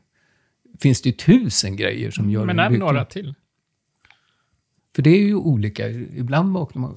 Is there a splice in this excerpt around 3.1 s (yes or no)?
no